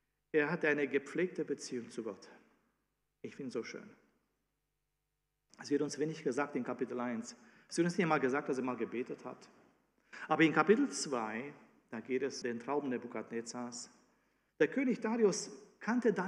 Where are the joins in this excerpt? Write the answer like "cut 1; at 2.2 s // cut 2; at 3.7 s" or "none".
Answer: cut 1; at 12.4 s // cut 2; at 14.5 s